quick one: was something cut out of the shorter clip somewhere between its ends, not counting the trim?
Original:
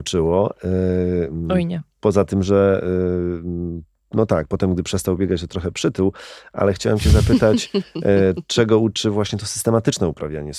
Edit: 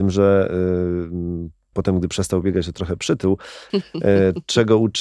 yes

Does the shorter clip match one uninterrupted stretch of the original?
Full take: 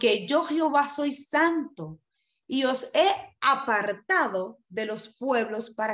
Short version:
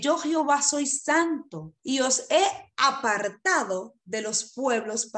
no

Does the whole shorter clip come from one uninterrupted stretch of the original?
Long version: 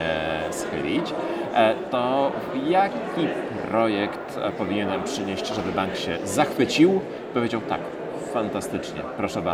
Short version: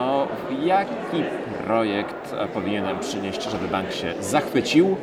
yes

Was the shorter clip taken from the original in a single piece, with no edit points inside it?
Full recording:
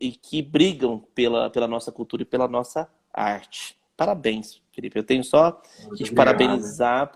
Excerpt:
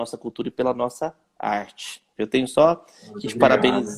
no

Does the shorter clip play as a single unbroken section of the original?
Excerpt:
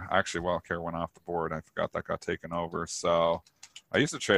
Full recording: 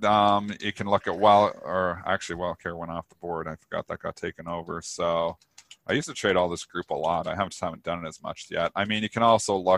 yes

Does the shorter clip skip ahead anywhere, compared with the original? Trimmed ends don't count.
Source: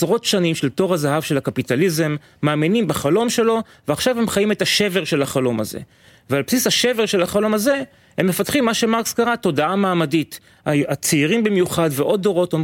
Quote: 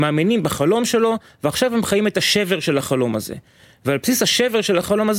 no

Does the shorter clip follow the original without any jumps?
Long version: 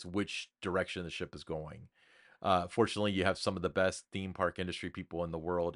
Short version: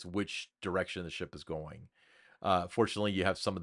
yes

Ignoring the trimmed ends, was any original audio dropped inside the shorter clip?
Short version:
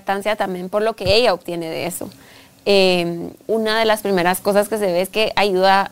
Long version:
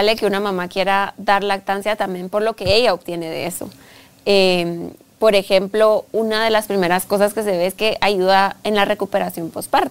yes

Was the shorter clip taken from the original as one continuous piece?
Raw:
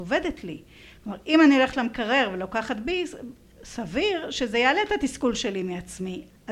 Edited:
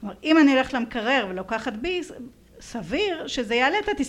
yes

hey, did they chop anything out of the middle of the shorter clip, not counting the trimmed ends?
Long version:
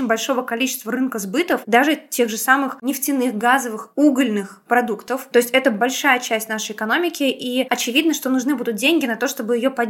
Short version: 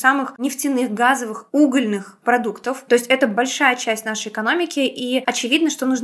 no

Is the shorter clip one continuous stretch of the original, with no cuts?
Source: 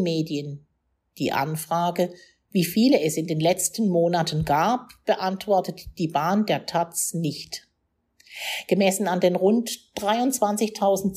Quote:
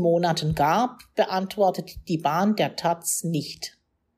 yes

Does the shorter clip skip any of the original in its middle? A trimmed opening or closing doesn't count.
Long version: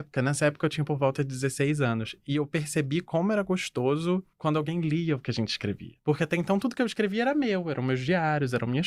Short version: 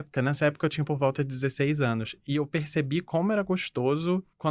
no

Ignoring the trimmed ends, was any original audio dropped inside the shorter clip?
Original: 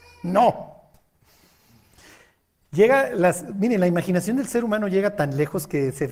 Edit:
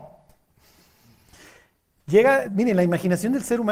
yes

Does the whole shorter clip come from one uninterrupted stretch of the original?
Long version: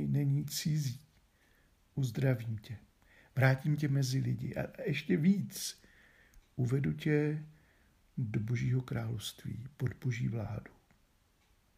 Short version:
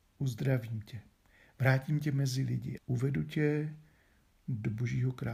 no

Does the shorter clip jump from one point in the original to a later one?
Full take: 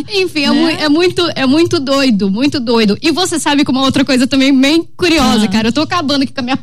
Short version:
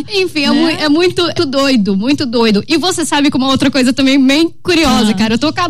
yes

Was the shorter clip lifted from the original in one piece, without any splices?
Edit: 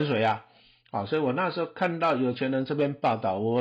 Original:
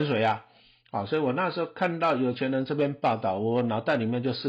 yes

